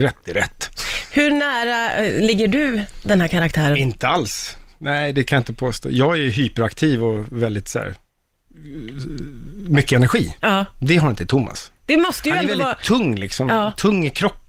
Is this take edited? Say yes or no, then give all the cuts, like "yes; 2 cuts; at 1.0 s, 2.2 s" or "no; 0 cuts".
no; 0 cuts